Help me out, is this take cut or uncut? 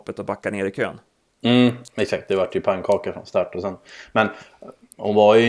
uncut